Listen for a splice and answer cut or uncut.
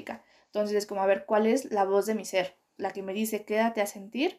cut